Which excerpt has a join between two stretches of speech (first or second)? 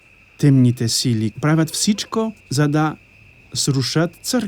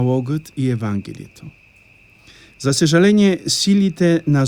first